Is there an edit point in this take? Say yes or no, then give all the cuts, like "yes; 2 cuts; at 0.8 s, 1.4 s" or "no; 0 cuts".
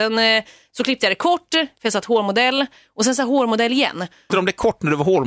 yes; 1 cut; at 4.3 s